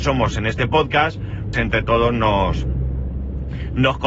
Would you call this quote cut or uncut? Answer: cut